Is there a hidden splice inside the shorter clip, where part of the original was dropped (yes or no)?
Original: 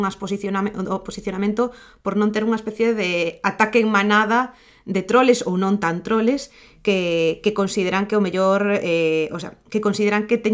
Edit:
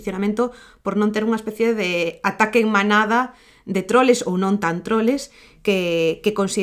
no